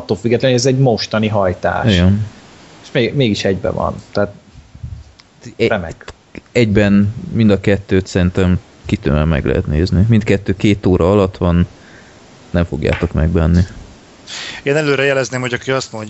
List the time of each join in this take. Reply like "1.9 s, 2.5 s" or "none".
none